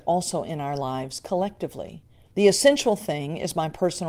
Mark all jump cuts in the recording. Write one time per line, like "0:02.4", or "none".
0:02.3